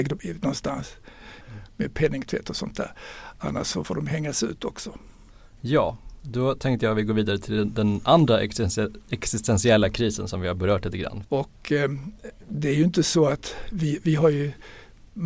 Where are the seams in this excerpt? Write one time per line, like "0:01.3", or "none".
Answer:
0:01.4
0:11.2